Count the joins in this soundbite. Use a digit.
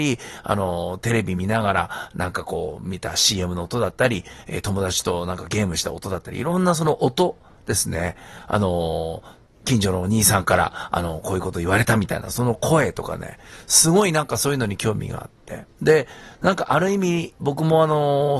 1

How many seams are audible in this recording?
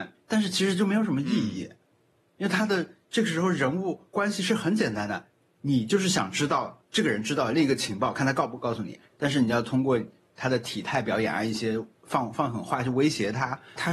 0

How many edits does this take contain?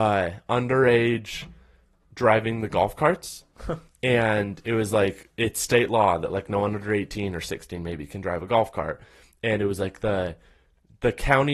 0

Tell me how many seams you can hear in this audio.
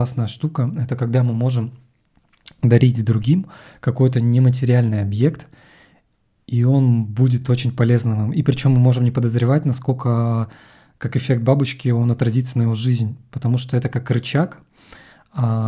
0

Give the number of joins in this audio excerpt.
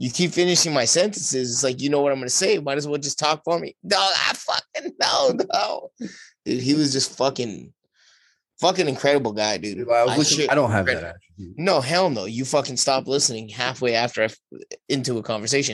1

